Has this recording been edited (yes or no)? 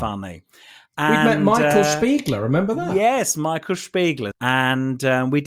yes